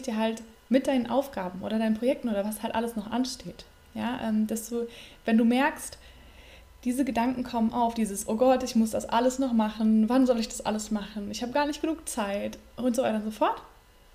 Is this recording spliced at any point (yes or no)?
no